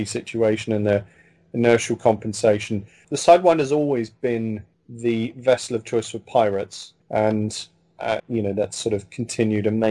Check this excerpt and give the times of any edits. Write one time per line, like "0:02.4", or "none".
0:07.0
0:08.2

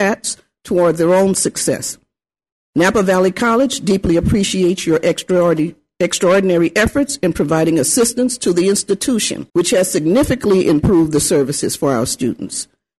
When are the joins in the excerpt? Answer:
0:02.5
0:09.5

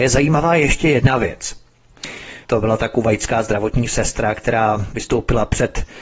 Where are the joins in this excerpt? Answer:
0:02.4

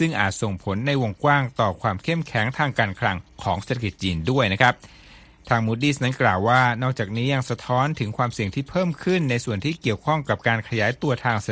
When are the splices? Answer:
none

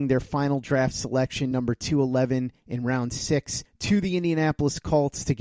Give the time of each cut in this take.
none

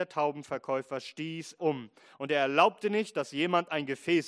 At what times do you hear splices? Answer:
0:01.6

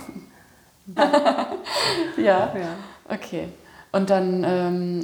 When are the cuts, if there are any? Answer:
0:01.0

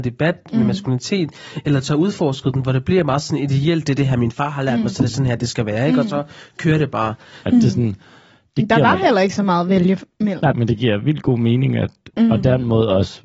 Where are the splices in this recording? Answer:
0:07.4
0:10.5
0:12.1

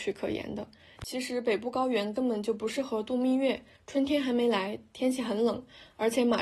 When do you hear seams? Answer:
0:01.0

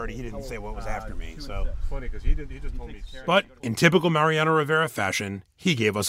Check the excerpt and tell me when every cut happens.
none

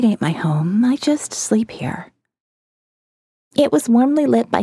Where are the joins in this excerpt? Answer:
none

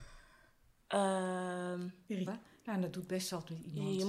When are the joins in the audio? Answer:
0:02.3

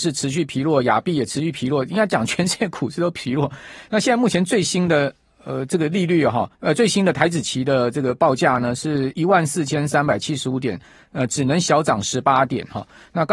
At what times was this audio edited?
0:09.1

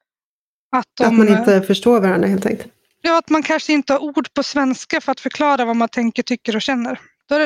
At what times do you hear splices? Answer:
none

